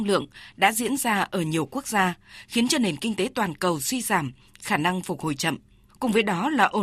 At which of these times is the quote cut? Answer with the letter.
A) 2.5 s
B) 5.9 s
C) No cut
B